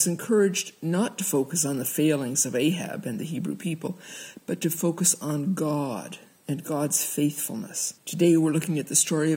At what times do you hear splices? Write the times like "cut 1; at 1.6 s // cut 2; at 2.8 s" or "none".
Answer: cut 1; at 8.0 s